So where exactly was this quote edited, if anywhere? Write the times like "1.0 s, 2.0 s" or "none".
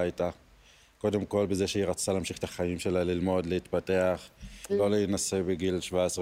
4.7 s